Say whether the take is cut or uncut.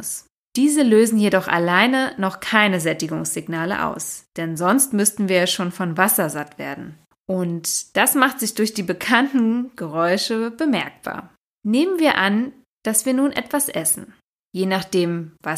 cut